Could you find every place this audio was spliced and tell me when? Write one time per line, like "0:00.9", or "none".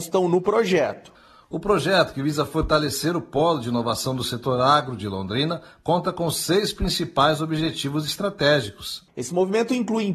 0:09.1